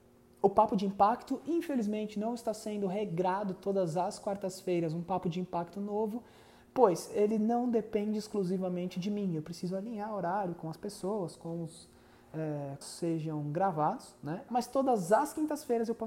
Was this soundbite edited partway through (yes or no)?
yes